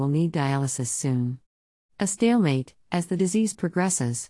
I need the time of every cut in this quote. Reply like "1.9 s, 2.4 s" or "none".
1.8 s